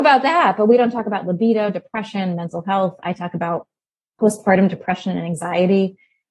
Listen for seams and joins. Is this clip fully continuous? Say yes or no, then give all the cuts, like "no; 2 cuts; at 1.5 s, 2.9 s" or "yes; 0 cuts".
yes; 0 cuts